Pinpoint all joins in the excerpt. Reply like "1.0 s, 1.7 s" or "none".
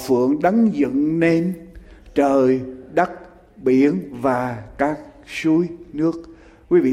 none